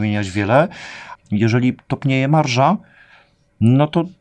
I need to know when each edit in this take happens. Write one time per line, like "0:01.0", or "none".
0:01.2